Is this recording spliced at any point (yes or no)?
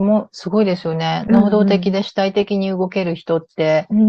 no